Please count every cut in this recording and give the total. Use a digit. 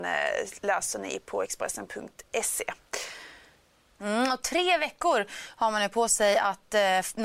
1